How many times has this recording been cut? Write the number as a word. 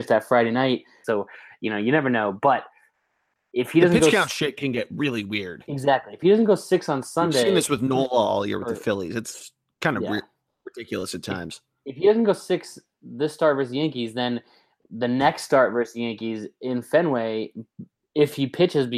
one